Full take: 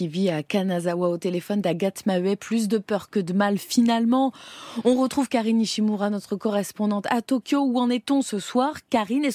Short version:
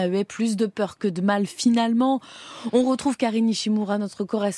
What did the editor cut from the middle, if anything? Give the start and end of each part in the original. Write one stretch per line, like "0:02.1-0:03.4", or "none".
none